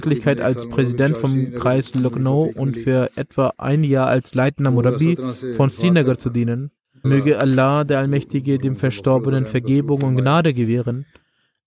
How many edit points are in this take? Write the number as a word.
one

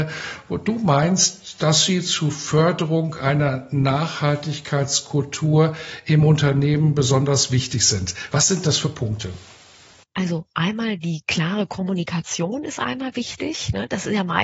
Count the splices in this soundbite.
zero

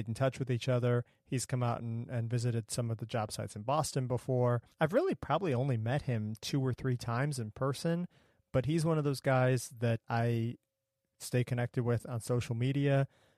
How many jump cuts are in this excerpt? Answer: two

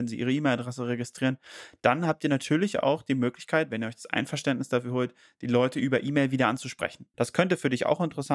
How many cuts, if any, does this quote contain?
one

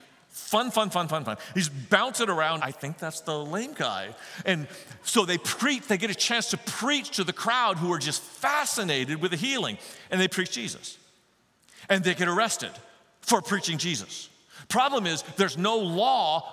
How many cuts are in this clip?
one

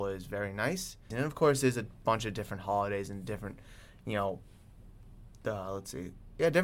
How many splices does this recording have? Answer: one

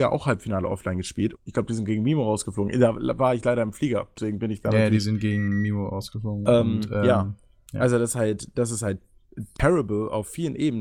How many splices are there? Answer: one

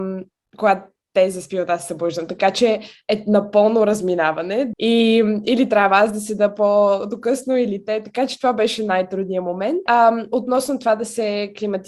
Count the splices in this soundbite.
two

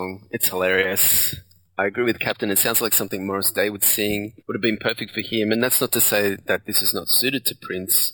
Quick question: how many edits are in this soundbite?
one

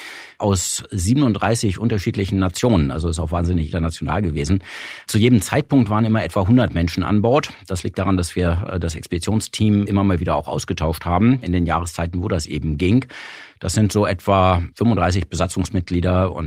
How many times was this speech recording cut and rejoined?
zero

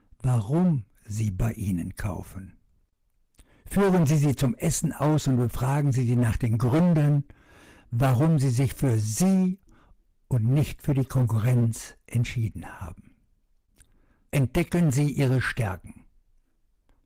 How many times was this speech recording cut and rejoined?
one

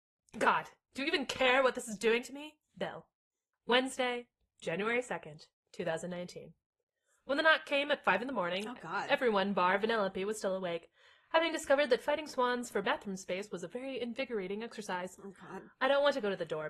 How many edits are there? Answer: zero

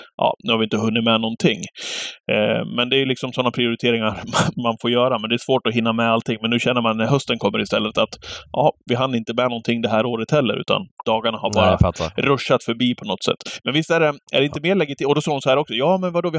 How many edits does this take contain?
one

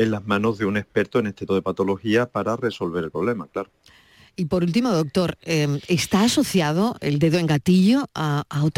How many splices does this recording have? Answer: one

